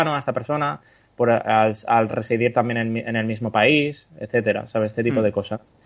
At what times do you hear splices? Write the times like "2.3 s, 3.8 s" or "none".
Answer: none